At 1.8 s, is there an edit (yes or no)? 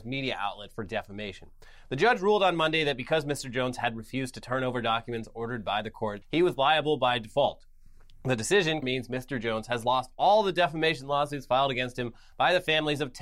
no